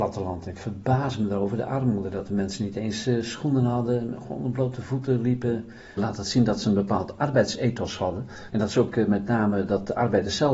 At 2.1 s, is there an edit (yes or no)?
no